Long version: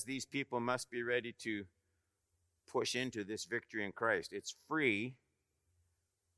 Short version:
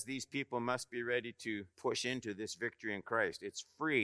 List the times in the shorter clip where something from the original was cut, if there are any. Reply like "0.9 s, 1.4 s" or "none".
1.7 s